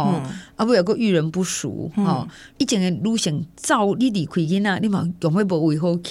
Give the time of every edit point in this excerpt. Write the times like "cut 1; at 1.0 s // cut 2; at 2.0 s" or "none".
cut 1; at 3.9 s